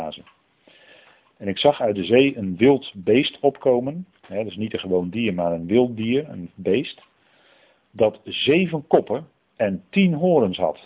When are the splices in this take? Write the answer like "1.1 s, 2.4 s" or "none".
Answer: 4.2 s